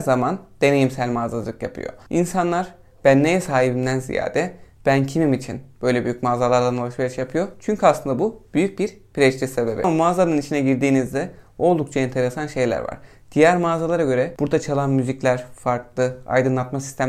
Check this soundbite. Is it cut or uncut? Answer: uncut